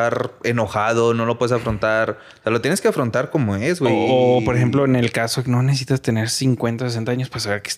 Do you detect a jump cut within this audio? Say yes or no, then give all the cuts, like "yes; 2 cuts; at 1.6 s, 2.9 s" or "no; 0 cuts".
no; 0 cuts